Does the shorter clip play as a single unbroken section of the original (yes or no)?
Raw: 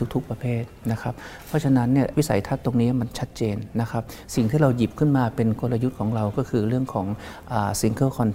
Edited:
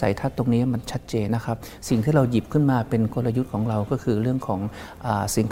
no